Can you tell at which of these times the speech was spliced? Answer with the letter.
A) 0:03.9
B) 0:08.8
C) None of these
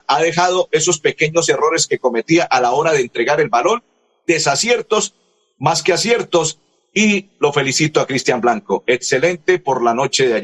C